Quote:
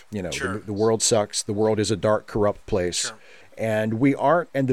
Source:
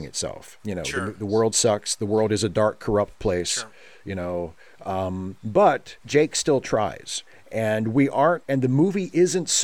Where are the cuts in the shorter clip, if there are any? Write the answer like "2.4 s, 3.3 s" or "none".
3.4 s